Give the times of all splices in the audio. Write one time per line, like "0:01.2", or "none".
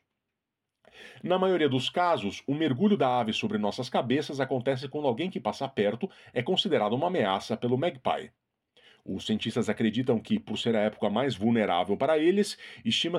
none